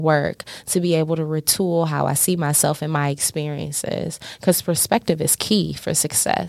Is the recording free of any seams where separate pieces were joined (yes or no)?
yes